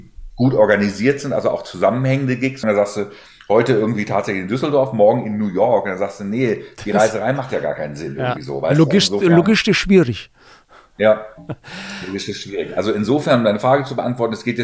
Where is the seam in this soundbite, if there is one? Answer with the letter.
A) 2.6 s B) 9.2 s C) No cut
A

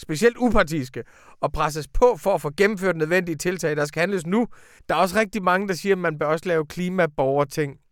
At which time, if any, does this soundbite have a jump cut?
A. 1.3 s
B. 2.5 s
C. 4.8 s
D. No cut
C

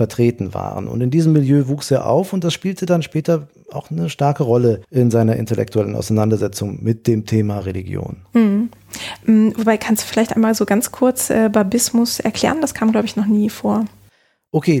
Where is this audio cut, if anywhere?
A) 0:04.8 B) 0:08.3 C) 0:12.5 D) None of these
A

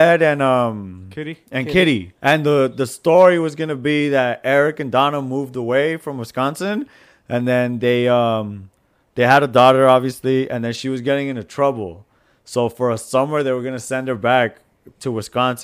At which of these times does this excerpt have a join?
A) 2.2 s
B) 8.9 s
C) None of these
A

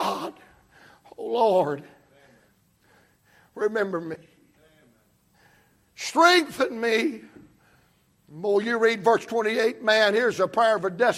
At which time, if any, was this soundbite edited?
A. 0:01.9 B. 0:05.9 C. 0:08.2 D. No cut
D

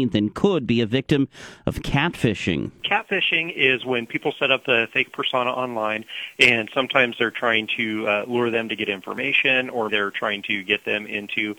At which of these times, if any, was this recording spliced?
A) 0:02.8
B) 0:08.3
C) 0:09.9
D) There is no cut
C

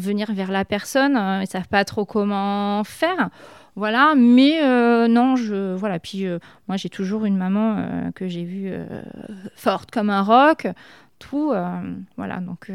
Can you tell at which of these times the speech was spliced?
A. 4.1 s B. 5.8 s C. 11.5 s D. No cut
D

